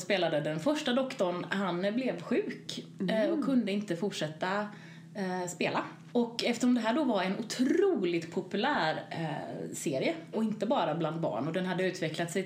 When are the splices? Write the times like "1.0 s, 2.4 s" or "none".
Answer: 6.1 s, 10.3 s